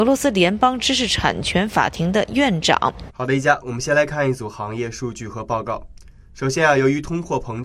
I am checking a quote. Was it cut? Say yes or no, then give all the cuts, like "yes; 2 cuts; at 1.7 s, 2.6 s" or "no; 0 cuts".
yes; 1 cut; at 3.1 s